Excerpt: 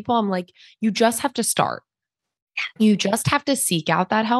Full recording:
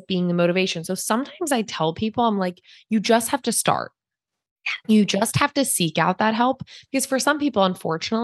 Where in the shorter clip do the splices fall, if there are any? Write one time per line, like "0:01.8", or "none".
none